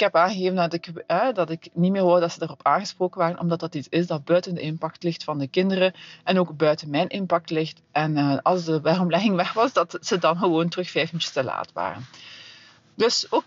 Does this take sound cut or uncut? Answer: uncut